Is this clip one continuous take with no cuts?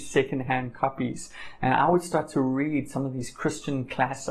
yes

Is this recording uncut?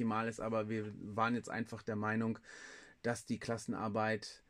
yes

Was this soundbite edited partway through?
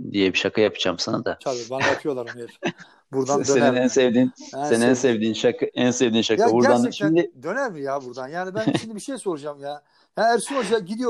no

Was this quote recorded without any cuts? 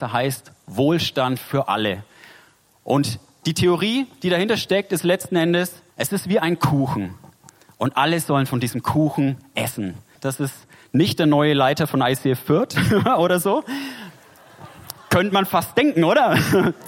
no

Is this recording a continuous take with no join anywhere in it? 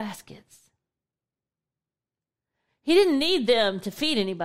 yes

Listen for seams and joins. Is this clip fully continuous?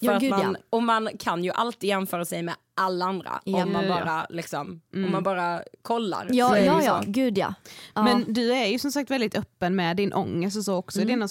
yes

